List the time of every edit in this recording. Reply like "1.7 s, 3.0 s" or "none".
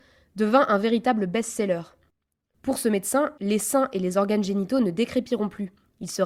3.4 s